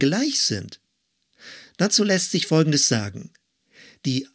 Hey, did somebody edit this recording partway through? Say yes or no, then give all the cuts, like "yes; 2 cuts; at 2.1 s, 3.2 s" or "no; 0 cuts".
no; 0 cuts